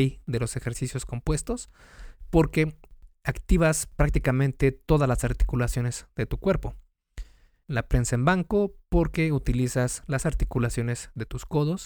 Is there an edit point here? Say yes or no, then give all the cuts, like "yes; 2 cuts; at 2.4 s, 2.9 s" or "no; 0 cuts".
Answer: yes; 1 cut; at 7.6 s